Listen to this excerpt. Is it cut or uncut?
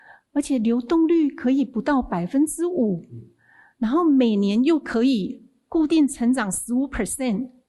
uncut